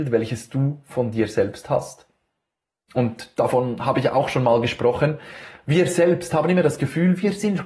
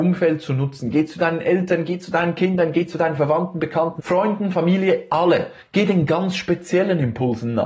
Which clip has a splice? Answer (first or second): second